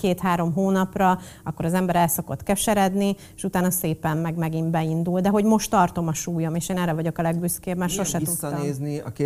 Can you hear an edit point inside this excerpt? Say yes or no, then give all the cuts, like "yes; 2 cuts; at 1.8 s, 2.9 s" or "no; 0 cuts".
no; 0 cuts